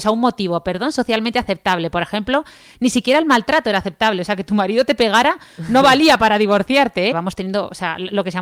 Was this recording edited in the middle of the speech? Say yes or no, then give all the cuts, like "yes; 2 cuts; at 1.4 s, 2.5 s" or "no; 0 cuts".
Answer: yes; 1 cut; at 7.1 s